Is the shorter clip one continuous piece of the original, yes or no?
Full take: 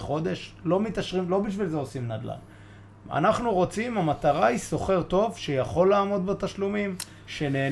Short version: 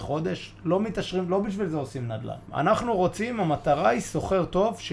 no